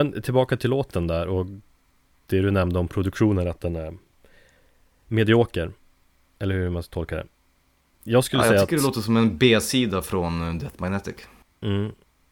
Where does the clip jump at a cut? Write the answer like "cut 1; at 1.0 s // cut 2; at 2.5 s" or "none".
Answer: none